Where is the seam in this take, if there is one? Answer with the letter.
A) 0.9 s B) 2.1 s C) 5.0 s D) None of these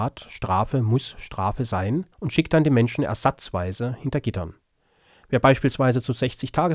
B